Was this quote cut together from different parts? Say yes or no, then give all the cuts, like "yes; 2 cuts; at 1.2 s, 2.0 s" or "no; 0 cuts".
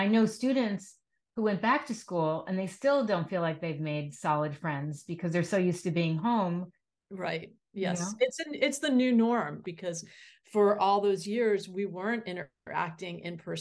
yes; 2 cuts; at 7.0 s, 9.6 s